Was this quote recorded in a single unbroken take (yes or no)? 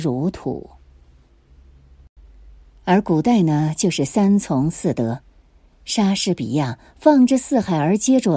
yes